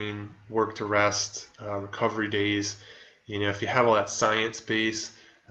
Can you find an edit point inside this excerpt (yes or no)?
no